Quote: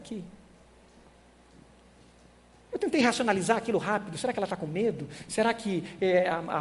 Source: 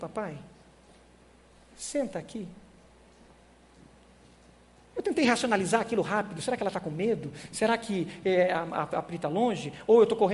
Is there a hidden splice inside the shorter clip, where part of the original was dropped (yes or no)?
no